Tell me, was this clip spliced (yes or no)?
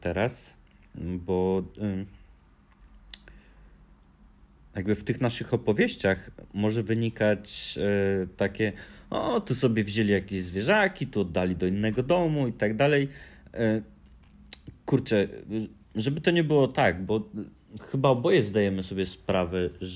no